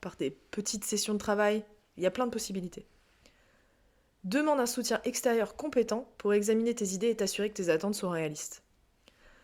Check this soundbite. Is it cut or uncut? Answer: uncut